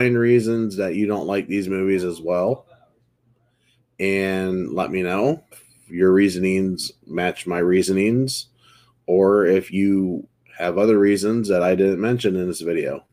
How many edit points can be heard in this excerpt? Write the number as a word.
one